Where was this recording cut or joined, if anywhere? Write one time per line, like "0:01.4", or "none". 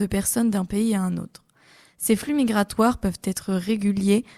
none